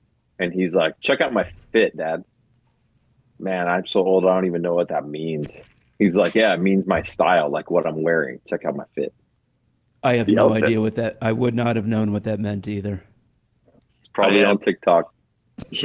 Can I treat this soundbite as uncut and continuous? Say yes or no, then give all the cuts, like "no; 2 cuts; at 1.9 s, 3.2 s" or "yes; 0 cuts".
yes; 0 cuts